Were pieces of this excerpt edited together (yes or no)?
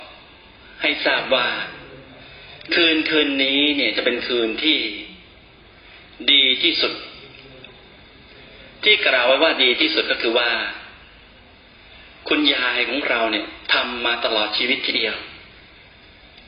no